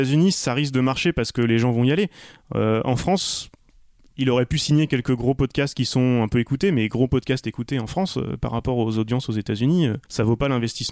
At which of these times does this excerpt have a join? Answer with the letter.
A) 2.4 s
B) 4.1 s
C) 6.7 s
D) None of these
D